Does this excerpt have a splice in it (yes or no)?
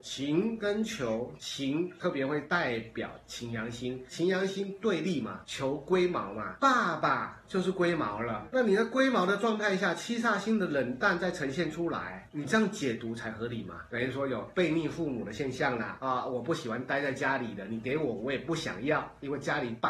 yes